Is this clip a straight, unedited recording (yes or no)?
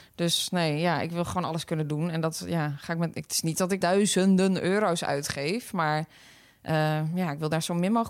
no